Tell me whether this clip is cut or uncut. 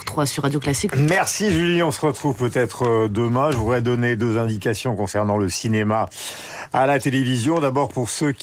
cut